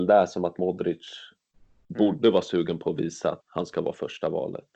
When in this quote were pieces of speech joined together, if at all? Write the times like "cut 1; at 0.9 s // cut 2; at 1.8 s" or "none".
cut 1; at 3.4 s